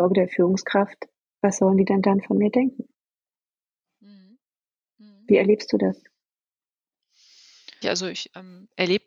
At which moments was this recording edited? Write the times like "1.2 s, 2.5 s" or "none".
7.8 s